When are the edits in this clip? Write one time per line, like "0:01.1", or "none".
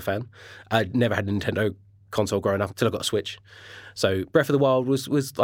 none